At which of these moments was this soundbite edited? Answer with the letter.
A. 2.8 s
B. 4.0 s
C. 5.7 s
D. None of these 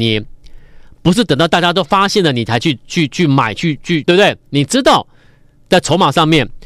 B